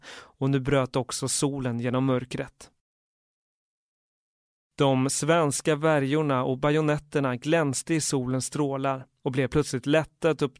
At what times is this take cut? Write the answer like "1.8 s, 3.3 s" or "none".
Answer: none